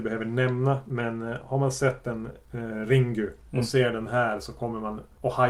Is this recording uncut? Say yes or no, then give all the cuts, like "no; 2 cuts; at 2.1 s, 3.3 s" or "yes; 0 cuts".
yes; 0 cuts